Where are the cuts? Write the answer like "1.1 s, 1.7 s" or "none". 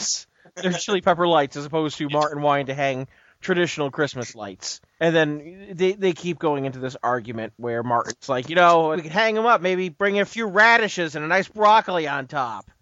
8.9 s